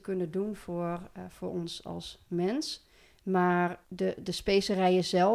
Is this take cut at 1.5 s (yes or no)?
no